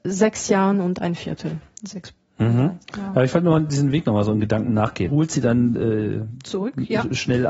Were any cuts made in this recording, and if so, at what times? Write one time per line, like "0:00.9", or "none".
0:05.1

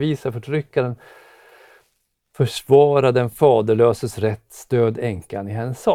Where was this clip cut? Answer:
none

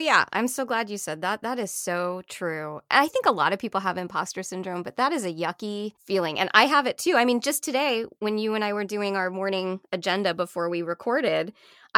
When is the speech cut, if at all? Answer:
0:06.0

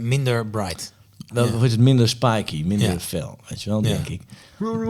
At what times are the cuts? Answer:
0:01.3
0:03.8

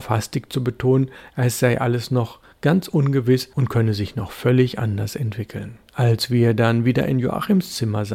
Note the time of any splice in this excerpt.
0:05.9

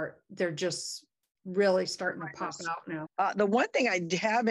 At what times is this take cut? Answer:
0:03.0

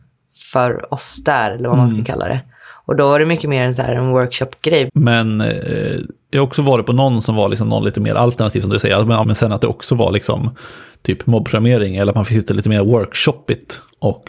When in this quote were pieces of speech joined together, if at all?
0:04.9
0:09.2

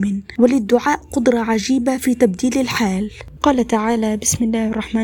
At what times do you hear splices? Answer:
0:03.4

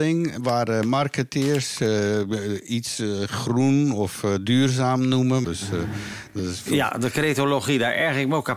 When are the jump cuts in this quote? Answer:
0:05.4

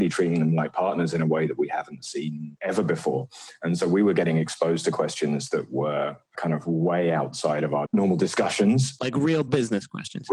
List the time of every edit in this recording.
0:07.9

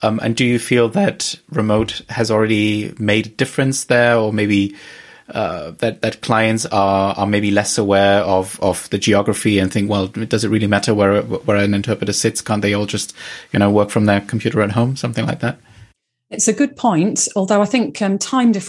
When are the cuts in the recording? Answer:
none

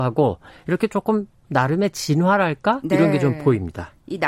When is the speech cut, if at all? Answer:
none

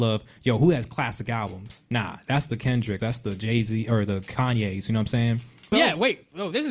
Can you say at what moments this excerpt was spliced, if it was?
0:03.0
0:05.7

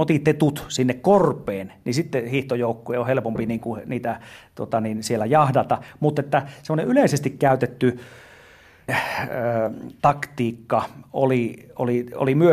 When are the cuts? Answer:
0:08.9

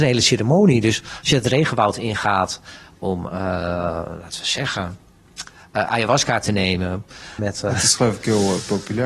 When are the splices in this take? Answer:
0:07.4

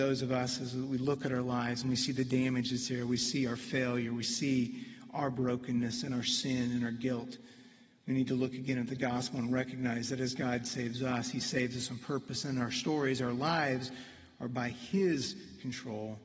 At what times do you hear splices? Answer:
none

